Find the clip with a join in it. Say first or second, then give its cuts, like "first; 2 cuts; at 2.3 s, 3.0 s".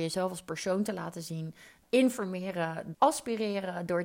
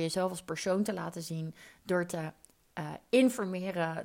first; 2 cuts; at 1.8 s, 2.9 s